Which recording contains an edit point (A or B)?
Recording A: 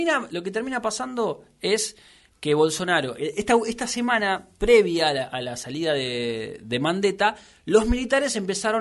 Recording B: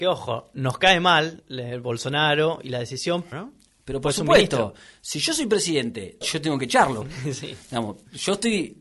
B